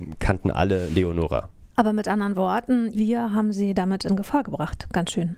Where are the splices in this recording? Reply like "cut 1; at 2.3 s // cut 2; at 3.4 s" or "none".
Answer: cut 1; at 2.9 s